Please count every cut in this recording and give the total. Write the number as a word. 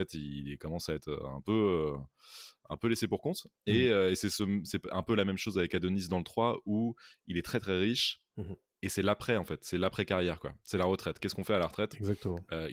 zero